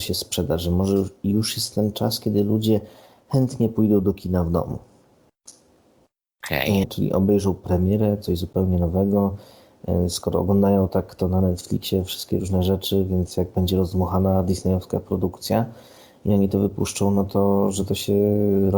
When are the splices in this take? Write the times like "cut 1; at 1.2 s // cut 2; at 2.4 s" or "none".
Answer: cut 1; at 6.8 s